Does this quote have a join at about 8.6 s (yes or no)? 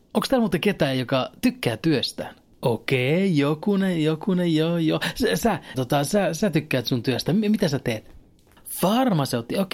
no